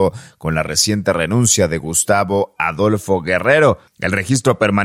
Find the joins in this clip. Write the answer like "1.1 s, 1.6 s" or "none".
3.9 s